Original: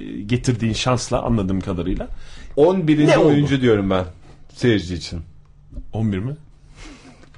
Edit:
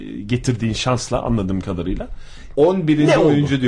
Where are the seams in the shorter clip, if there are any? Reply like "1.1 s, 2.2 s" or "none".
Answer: none